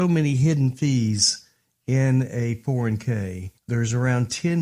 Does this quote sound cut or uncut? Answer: cut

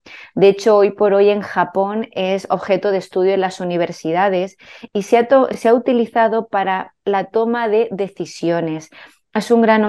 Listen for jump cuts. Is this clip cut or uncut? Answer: uncut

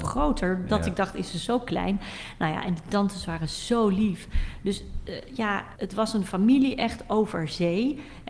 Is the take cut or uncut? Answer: cut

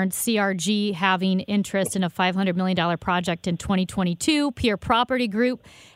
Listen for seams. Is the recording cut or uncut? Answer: uncut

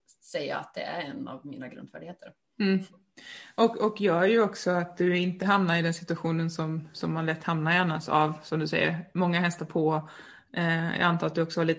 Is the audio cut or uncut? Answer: uncut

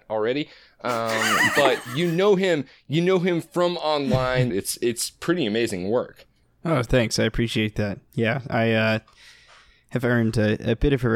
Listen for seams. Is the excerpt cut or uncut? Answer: cut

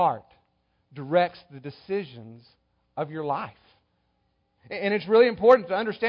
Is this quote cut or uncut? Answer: uncut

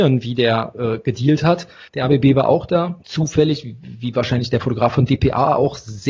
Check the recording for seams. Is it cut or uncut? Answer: cut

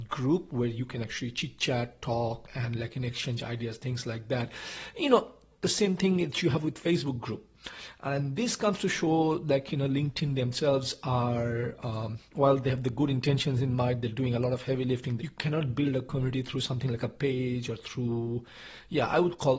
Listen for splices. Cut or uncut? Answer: cut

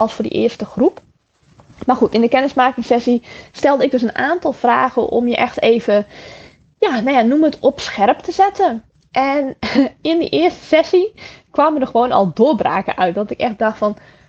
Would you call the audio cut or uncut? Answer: uncut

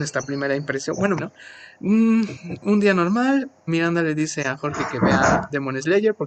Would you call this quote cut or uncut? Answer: cut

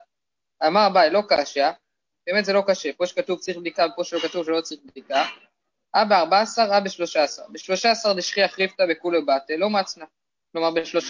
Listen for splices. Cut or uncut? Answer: uncut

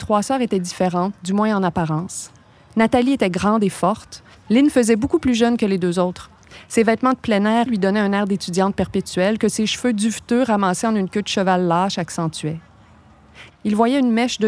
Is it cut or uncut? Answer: cut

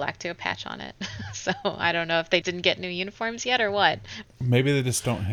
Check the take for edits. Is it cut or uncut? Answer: cut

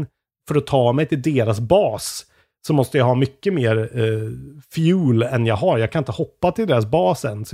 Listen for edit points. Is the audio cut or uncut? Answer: uncut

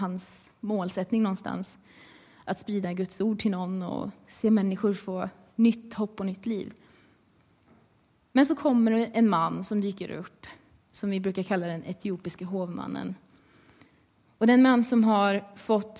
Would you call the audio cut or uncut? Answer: uncut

